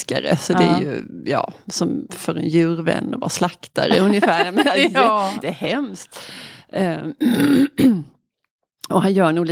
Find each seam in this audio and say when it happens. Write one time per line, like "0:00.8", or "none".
0:05.4